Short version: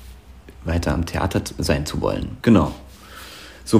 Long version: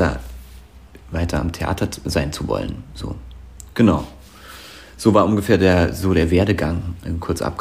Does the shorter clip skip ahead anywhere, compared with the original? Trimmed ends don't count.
yes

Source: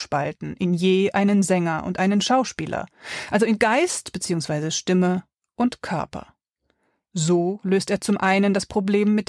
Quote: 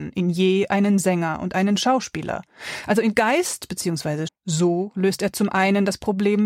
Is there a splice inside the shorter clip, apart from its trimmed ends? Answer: yes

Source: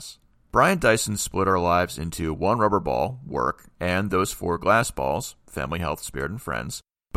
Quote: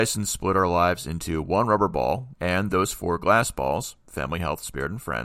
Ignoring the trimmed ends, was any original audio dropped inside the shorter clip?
yes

